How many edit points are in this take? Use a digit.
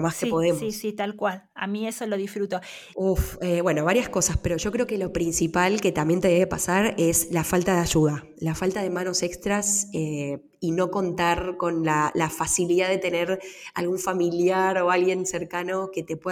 1